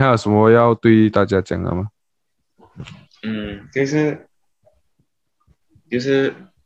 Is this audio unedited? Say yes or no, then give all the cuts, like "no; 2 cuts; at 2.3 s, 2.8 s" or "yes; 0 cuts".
no; 1 cut; at 3.1 s